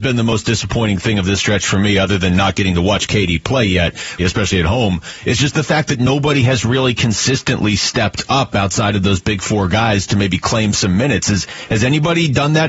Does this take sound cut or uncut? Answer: cut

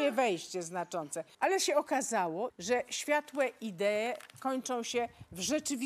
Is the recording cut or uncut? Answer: cut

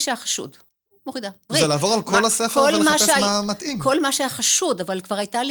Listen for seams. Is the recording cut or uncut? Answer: cut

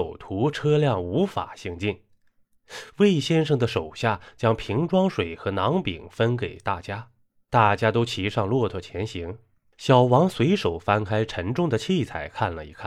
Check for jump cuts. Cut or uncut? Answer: uncut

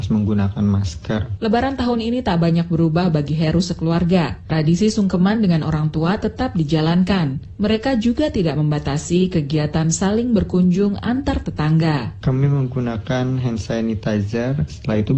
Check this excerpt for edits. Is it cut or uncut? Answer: cut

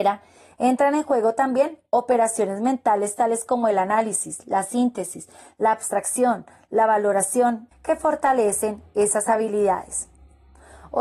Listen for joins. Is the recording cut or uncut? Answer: cut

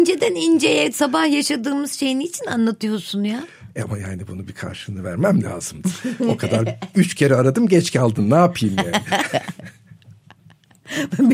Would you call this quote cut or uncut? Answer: uncut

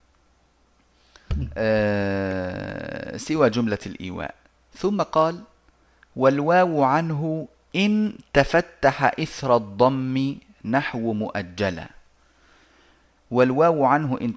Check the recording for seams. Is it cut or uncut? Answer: uncut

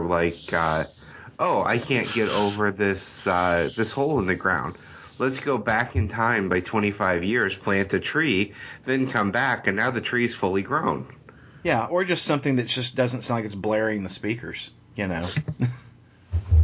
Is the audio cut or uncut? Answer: cut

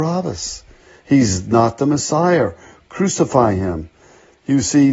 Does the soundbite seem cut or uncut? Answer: uncut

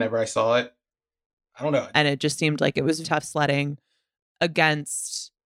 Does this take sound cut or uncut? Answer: cut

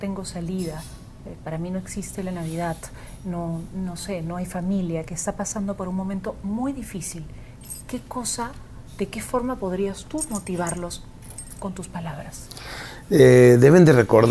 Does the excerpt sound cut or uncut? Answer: uncut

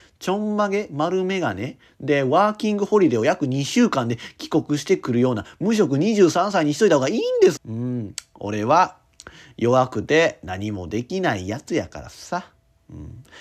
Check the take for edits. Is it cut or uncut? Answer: cut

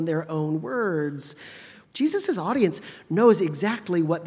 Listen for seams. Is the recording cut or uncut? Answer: cut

